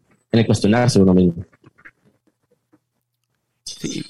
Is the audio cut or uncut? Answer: uncut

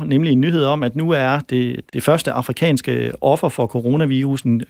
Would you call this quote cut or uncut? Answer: cut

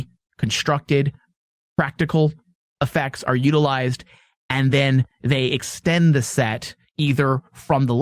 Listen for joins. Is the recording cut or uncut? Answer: uncut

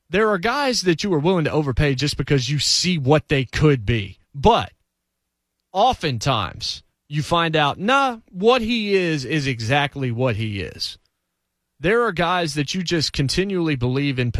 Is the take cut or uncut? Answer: uncut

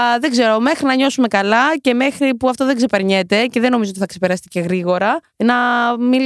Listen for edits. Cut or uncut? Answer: uncut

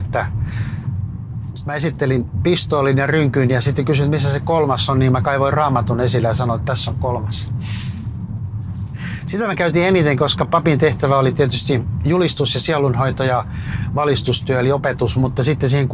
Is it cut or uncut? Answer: uncut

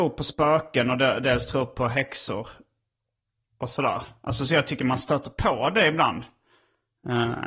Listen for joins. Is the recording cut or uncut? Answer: uncut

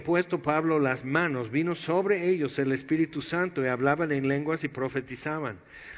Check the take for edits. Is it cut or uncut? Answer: uncut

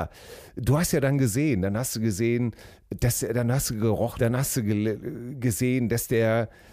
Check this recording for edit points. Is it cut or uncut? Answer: cut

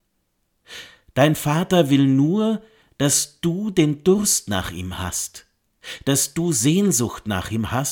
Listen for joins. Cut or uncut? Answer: uncut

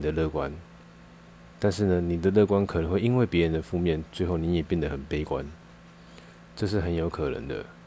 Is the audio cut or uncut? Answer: uncut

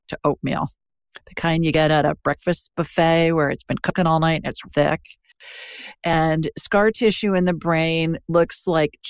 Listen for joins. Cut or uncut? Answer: cut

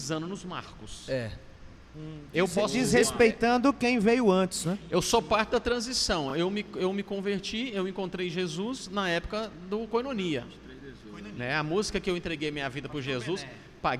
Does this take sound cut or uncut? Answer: uncut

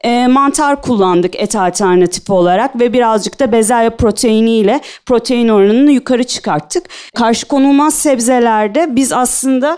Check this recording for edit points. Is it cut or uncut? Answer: cut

